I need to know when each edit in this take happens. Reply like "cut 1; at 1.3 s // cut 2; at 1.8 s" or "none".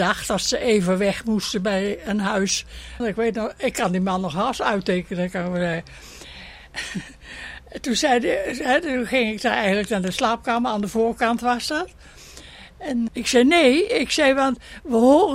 cut 1; at 3.0 s // cut 2; at 13.1 s